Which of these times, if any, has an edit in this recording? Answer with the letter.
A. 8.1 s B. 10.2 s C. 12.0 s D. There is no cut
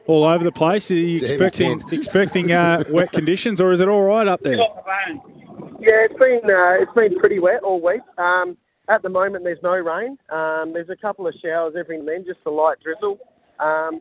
C